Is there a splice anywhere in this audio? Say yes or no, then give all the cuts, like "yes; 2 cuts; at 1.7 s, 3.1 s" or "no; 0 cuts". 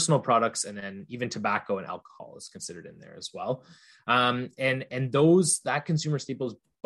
no; 0 cuts